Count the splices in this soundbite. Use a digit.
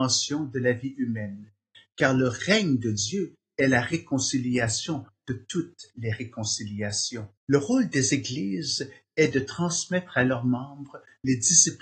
1